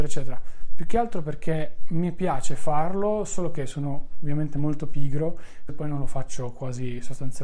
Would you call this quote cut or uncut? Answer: cut